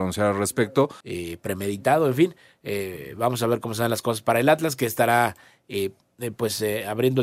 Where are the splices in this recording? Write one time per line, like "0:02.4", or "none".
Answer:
0:01.0

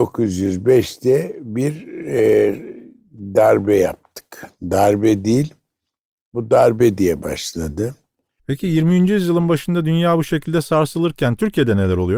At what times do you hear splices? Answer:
0:08.4

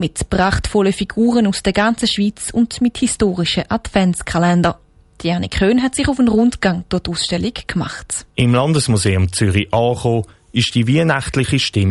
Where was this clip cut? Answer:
0:08.3

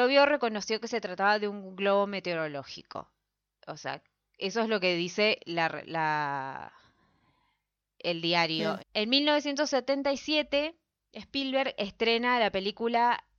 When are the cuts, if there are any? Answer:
0:08.8

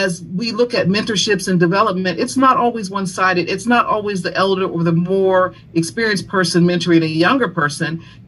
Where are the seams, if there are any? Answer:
none

